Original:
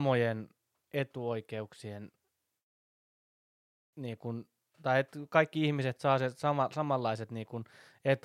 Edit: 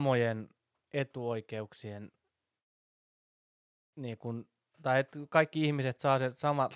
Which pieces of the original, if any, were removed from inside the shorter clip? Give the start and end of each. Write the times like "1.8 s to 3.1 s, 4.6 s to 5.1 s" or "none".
none